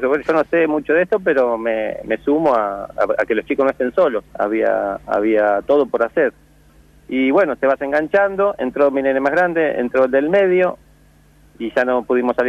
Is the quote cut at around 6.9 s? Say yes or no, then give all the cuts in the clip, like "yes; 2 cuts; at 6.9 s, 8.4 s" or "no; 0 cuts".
no; 1 cut; at 4.3 s